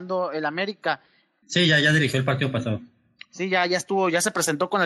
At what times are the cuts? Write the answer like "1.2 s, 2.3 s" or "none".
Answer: 1.4 s